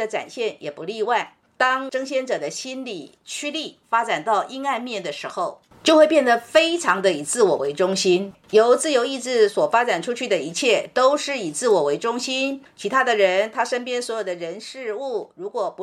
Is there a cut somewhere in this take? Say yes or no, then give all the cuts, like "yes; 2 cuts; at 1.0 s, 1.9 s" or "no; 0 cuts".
no; 0 cuts